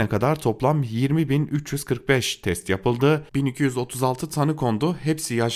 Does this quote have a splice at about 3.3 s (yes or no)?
yes